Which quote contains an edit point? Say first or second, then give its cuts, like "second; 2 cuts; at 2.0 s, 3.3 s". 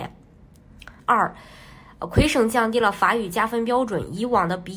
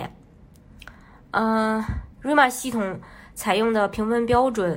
first; 1 cut; at 1.0 s